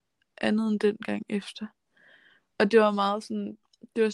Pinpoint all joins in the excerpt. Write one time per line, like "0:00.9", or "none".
none